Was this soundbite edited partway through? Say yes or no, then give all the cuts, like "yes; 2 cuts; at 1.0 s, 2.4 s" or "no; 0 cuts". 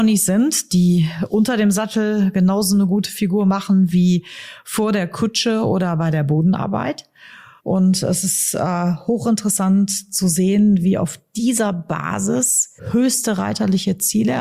yes; 2 cuts; at 7.6 s, 12.8 s